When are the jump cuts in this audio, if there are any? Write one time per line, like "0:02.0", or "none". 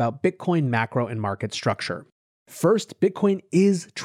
none

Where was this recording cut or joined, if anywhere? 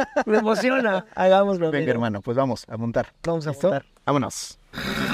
none

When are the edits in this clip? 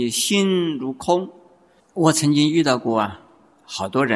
0:01.8

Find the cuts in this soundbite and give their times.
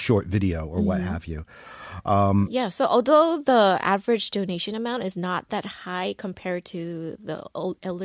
none

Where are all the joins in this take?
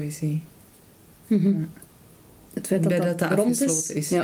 0:02.5

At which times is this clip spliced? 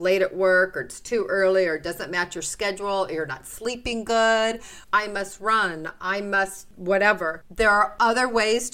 0:04.8

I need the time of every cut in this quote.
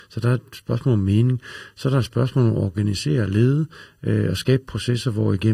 none

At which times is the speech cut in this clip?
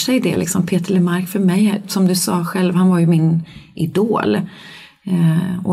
none

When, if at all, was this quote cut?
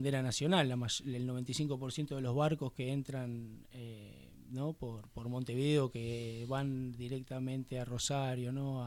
none

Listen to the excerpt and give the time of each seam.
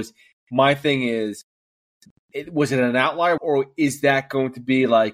0:03.4

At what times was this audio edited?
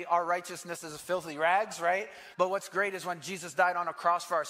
0:02.3

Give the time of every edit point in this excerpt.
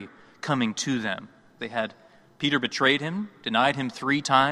0:01.6

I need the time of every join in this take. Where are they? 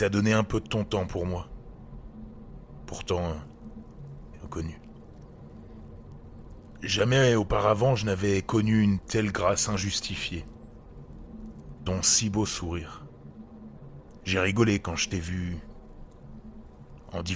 0:04.3
0:11.8
0:14.2

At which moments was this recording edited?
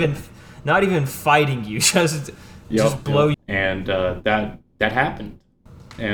0:03.3

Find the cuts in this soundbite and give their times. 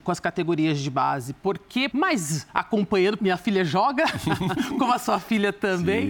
0:01.9
0:03.2

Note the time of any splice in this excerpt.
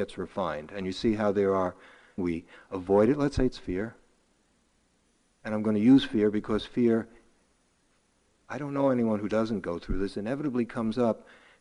0:02.2

